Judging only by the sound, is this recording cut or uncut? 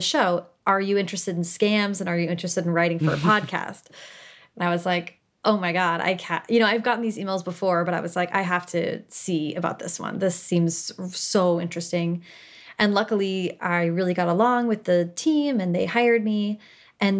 uncut